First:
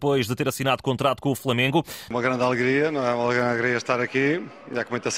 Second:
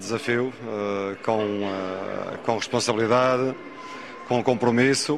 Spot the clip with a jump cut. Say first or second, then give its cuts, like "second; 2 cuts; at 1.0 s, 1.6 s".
first; 1 cut; at 2.1 s